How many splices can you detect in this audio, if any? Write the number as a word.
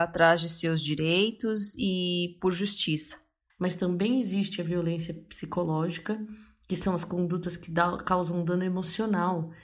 one